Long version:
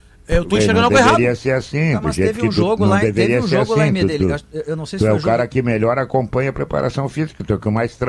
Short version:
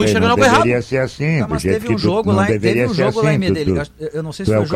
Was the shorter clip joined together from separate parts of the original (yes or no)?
no